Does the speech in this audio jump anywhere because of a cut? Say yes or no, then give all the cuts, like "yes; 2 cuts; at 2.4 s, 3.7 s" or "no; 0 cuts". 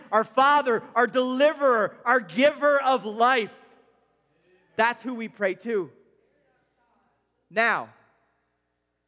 no; 0 cuts